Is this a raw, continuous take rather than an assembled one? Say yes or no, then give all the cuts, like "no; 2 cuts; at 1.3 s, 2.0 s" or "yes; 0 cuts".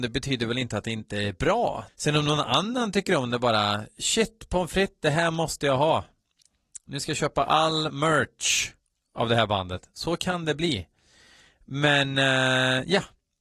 no; 1 cut; at 1.9 s